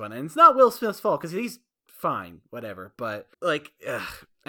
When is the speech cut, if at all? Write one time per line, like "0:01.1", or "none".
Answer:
0:03.3